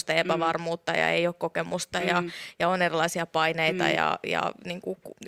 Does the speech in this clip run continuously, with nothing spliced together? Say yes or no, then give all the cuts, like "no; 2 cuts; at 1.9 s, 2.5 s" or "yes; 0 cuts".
yes; 0 cuts